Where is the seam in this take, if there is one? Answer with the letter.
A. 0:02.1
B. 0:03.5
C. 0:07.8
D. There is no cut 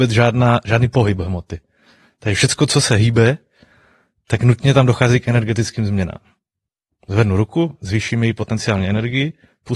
D